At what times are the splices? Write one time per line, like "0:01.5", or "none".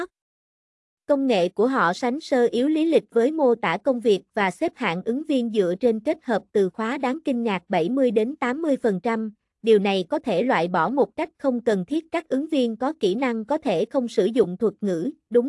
0:01.9